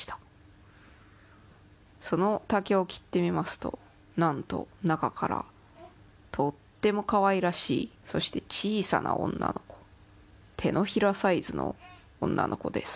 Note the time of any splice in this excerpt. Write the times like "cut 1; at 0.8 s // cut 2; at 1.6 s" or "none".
cut 1; at 7.9 s